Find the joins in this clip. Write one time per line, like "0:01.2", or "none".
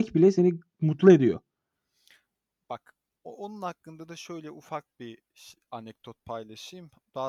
none